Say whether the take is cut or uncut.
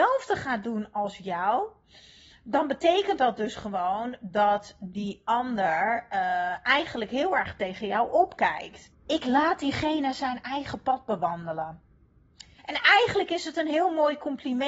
cut